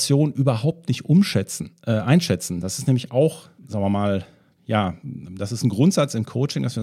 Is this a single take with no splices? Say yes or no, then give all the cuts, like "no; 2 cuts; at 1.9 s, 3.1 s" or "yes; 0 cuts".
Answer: no; 1 cut; at 3.6 s